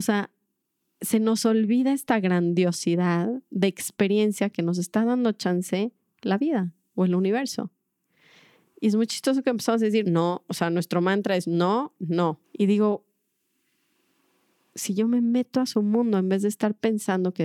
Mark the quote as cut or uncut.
cut